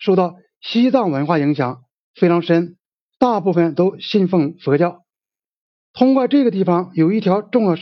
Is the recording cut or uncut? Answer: uncut